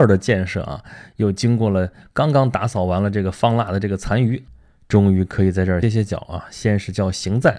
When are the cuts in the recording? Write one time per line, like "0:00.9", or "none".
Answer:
0:05.8